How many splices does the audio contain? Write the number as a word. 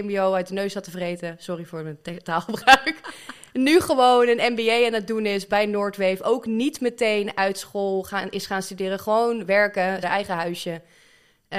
one